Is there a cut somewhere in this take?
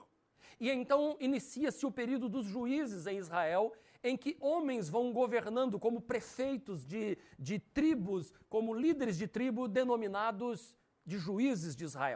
no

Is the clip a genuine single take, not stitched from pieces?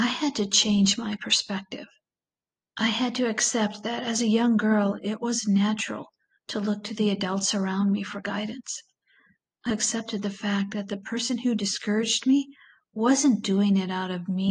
no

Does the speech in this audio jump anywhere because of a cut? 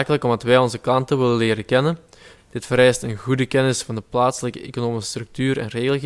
yes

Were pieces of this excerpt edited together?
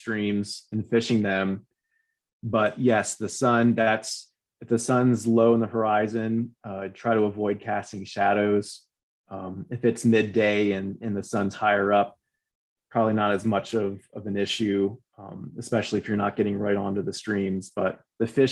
no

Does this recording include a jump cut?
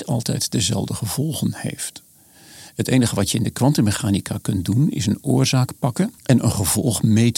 yes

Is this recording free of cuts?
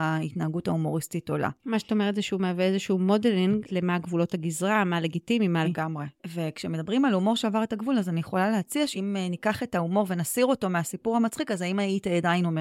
no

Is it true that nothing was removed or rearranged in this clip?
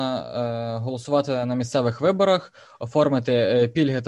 yes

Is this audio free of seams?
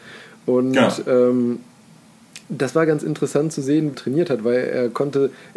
no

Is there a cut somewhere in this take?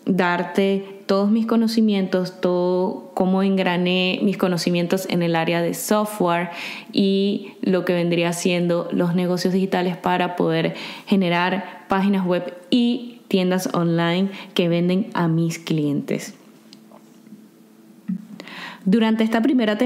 no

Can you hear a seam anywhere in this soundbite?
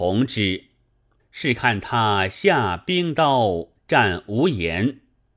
yes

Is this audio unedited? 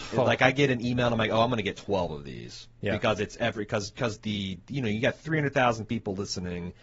yes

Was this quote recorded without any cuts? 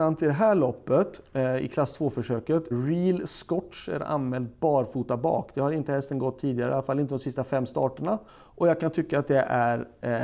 no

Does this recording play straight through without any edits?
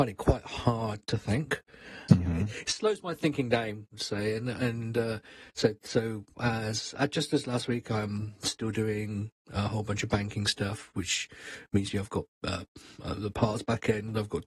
no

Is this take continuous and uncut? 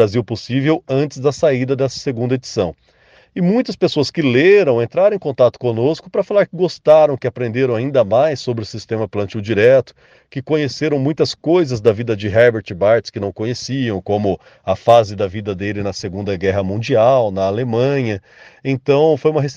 yes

